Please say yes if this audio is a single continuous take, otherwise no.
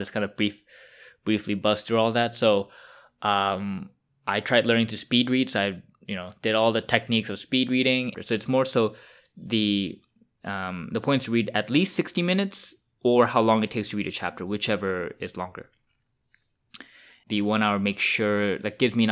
no